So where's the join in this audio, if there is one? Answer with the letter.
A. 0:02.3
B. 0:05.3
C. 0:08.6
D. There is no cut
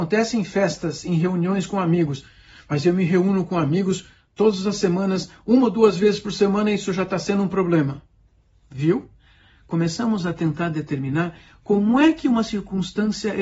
D